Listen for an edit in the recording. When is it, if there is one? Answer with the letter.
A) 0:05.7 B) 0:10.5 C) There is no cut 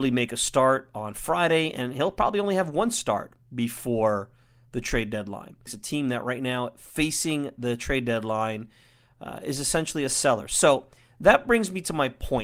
A